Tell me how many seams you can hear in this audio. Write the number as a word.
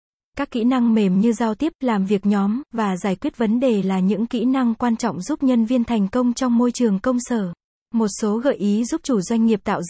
one